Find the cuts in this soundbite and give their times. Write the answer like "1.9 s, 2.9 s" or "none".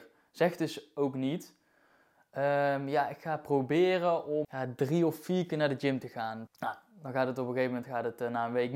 4.4 s, 6.5 s

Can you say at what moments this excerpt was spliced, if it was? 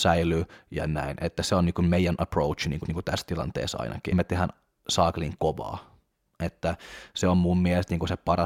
2.8 s, 4.1 s

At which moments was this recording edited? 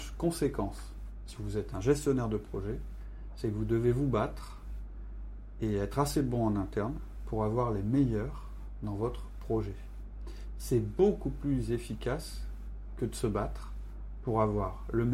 none

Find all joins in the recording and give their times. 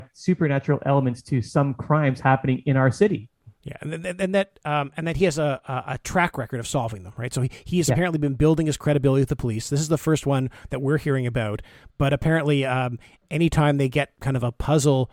none

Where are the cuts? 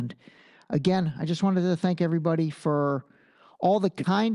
none

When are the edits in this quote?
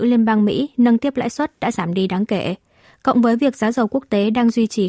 none

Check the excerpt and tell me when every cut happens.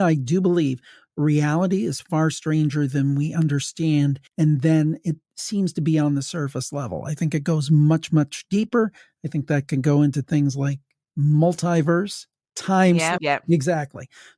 4.3 s, 13.2 s

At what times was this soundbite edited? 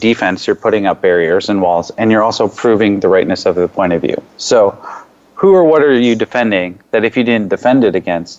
4.3 s

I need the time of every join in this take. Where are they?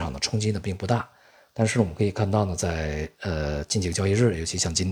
none

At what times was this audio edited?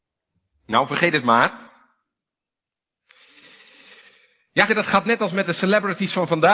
4.7 s

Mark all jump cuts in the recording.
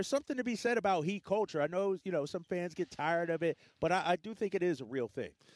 none

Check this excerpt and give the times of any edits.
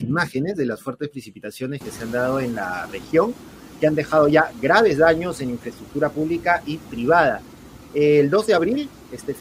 none

